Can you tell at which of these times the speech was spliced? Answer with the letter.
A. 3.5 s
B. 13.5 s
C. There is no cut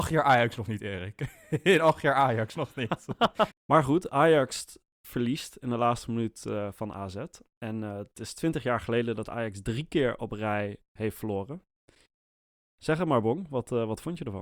A